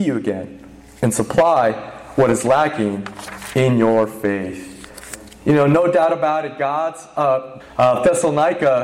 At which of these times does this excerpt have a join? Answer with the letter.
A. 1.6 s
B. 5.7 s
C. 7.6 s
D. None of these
C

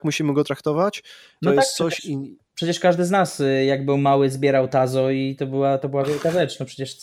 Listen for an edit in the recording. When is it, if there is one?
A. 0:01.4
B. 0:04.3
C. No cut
A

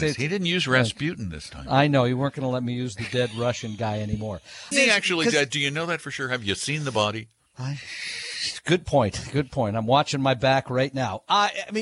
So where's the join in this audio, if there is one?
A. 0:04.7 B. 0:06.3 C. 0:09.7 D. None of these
A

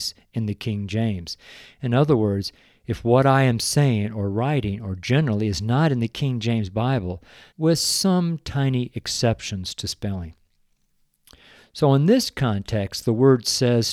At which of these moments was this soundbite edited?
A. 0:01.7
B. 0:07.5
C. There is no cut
B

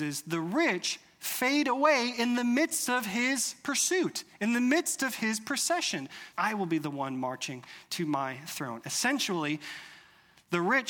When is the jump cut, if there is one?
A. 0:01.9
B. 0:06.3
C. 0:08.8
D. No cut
B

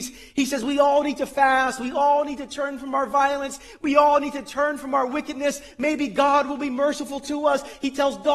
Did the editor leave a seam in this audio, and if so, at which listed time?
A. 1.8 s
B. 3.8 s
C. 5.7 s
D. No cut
D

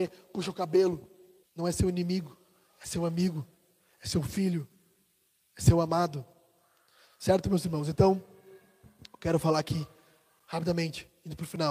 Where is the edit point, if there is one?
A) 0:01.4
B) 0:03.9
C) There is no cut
A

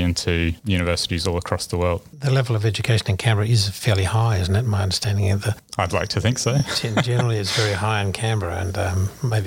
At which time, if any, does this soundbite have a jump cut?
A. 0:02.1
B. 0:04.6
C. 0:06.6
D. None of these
D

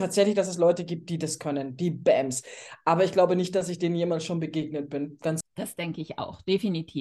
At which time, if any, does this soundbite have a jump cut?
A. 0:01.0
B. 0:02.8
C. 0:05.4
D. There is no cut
C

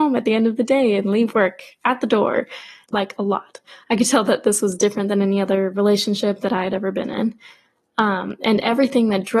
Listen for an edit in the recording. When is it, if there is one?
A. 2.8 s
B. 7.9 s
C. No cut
A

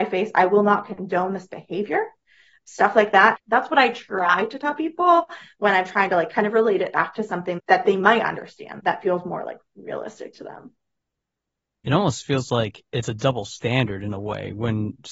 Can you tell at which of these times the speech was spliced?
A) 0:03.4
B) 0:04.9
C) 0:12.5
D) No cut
A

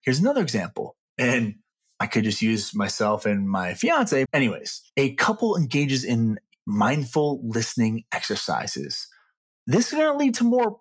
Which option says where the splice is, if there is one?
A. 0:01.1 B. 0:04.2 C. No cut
B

